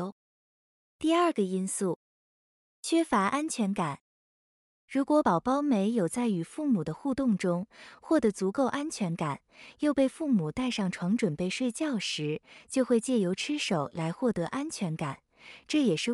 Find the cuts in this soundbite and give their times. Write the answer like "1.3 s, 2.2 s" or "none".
none